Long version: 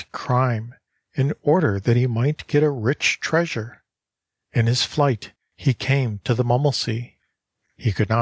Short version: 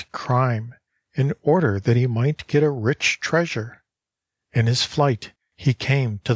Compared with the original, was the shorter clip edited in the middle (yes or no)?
no